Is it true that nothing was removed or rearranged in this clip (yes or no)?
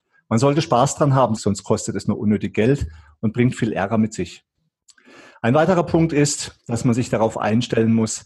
no